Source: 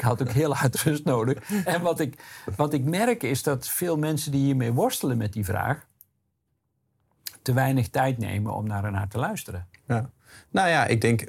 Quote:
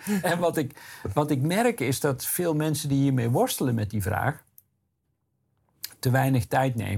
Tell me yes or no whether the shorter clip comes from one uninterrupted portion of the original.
yes